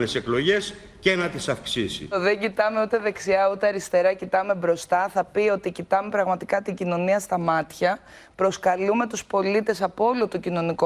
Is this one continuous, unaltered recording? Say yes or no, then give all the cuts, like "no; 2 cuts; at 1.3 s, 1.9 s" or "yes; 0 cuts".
yes; 0 cuts